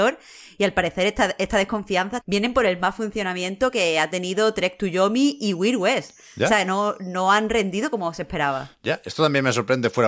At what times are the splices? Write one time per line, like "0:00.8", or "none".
0:02.2